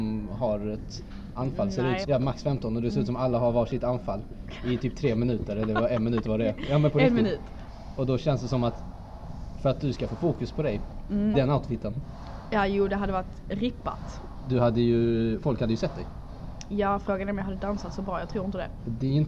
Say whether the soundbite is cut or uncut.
cut